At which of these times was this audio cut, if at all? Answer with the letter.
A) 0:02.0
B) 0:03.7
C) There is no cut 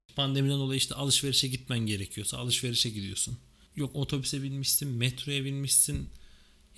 B